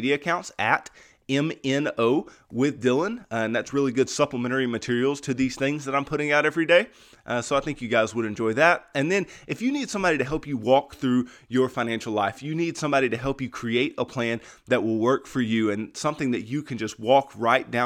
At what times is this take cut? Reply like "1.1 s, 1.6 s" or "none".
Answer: none